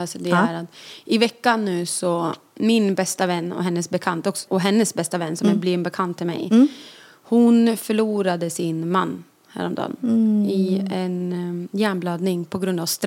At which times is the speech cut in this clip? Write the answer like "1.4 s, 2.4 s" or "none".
4.5 s